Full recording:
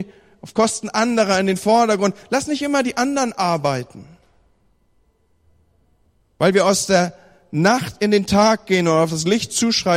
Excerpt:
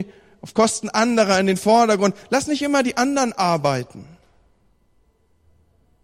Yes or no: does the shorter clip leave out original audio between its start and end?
no